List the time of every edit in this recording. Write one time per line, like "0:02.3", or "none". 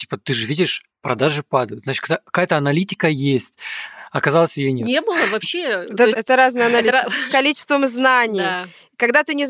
0:06.1
0:07.3